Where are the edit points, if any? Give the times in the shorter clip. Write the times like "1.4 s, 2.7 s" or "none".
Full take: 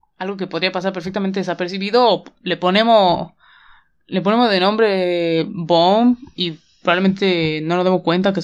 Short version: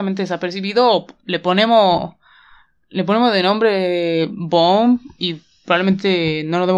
none